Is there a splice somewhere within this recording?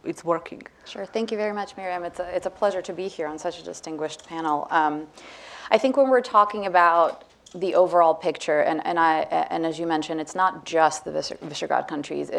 no; 0 cuts

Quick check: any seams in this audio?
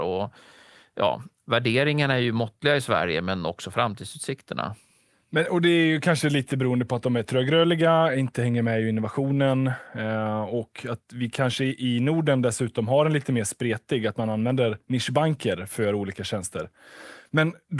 no; 0 cuts

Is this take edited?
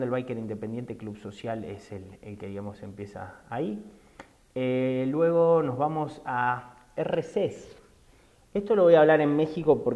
no; 0 cuts

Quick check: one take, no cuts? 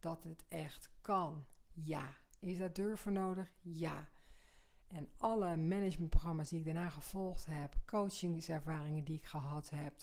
no; 2 cuts; at 1.7 s, 4.8 s

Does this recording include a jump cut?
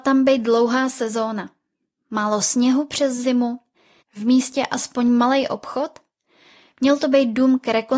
yes; 1 cut; at 4.0 s

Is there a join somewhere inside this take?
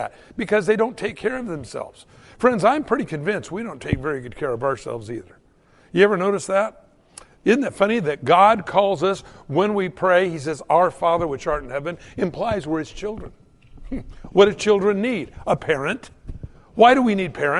no; 0 cuts

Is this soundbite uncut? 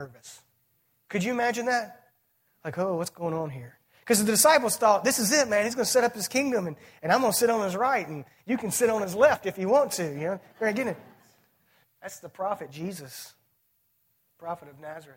no; 1 cut; at 11.8 s

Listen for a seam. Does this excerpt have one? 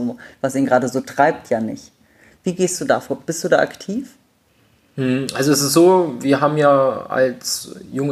no; 0 cuts

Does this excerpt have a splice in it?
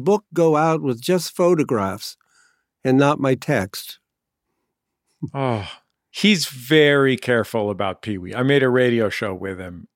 no; 0 cuts

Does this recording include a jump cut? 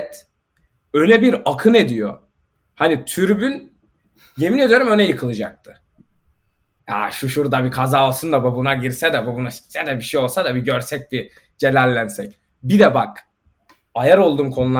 yes; 1 cut; at 6.8 s

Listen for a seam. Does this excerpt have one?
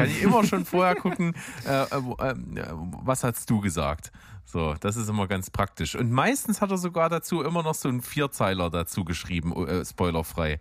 no; 0 cuts

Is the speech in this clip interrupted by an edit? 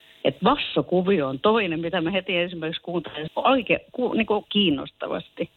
yes; 2 cuts; at 3.3 s, 4.5 s

